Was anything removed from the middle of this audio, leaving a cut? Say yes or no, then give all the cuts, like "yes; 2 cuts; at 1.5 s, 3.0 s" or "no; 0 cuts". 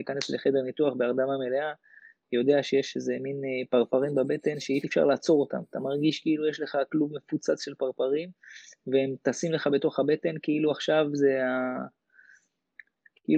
yes; 1 cut; at 4.8 s